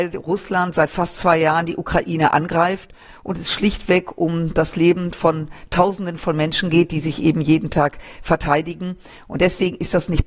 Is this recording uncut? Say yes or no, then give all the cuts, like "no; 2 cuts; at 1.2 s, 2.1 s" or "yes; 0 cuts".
yes; 0 cuts